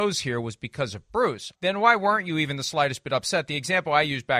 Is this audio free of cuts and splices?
no; 1 cut; at 1.5 s

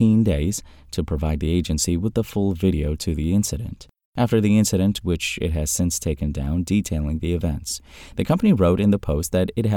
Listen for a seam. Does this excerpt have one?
yes; 1 cut; at 5.0 s

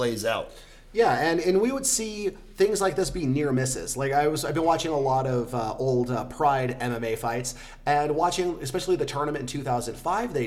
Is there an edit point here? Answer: no; 0 cuts

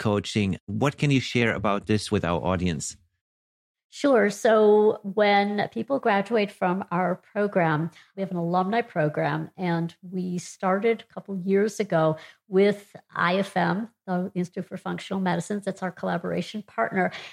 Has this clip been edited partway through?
no; 0 cuts

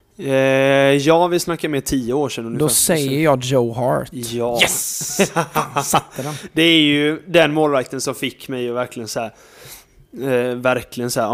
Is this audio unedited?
yes; 0 cuts

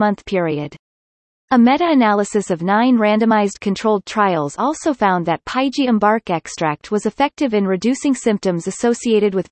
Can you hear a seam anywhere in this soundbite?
no; 0 cuts

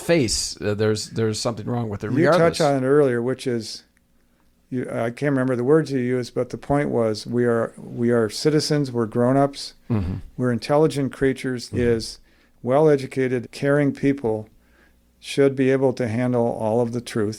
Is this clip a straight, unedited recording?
no; 2 cuts; at 11.7 s, 13.4 s

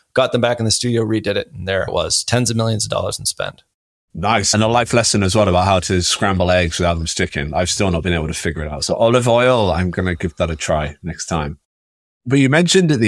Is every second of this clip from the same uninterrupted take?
yes; 0 cuts

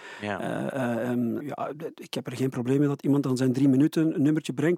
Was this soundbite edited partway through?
yes; 1 cut; at 1.4 s

